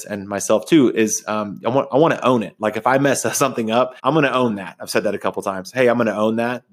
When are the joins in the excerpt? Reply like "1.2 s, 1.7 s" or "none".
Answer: 4.0 s